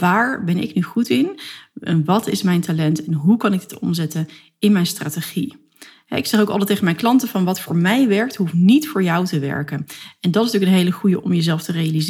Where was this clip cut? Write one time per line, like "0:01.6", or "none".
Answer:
none